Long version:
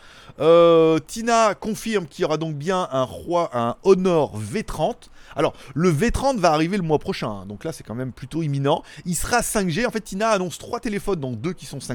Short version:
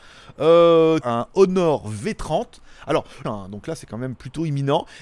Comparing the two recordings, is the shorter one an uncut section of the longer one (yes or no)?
no